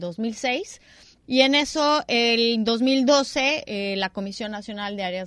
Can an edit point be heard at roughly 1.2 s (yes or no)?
yes